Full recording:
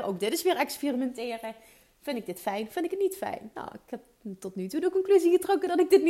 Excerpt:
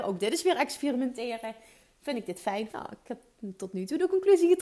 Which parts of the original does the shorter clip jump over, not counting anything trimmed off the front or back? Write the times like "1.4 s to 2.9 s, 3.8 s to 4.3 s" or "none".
2.7 s to 3.5 s